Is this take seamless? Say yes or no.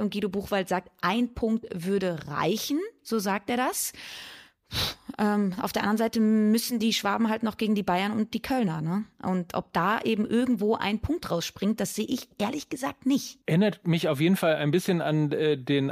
no